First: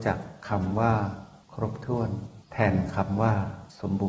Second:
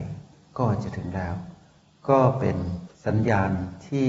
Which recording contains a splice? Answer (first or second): first